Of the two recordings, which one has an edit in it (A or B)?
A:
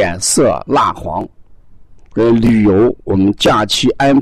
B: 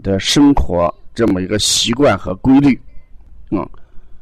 A